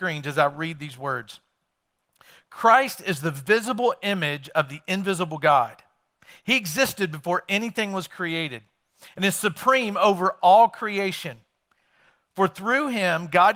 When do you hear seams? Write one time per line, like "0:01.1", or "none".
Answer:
none